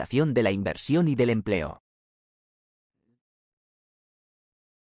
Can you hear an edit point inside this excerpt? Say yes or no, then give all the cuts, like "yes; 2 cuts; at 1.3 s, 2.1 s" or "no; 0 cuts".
no; 0 cuts